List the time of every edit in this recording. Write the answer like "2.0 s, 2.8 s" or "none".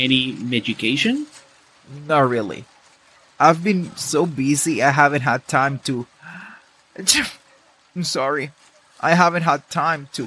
none